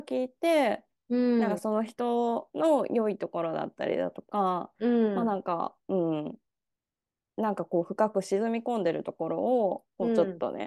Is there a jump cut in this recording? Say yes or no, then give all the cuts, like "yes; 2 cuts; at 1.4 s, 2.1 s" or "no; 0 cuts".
no; 0 cuts